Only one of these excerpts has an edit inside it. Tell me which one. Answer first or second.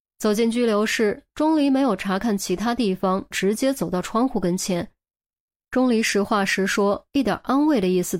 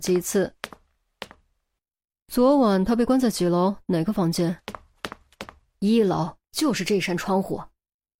first